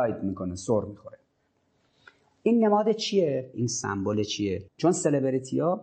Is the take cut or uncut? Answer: cut